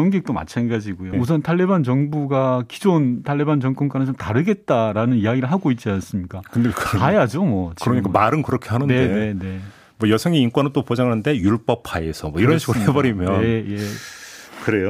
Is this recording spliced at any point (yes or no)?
yes